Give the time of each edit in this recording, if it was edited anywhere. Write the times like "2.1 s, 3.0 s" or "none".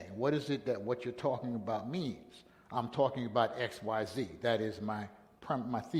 none

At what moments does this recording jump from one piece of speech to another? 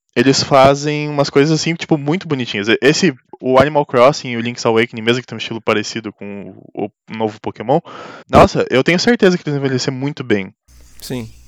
8.2 s

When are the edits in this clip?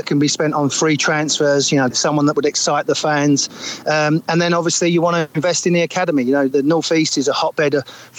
1.9 s

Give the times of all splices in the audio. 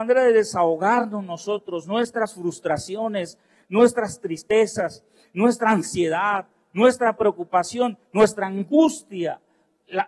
none

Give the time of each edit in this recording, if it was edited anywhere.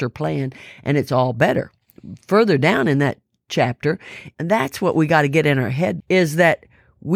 4.3 s, 6.0 s

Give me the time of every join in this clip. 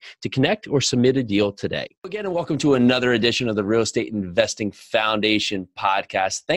2.0 s

